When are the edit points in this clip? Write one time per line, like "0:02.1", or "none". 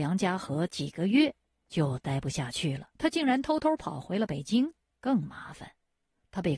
0:03.0
0:04.9